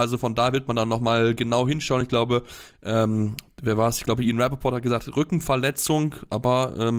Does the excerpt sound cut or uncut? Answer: uncut